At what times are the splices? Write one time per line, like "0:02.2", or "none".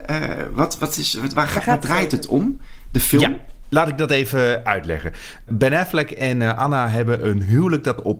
0:01.3